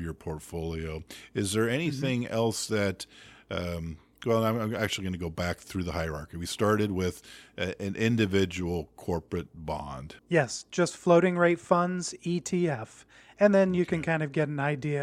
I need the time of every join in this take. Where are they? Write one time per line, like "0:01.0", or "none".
0:10.2